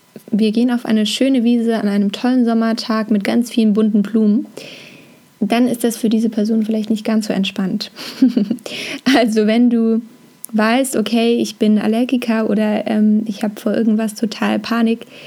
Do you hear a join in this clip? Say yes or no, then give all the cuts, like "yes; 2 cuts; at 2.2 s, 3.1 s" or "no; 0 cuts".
no; 0 cuts